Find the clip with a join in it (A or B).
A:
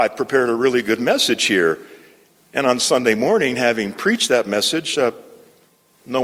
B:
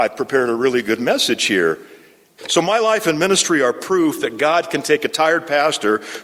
B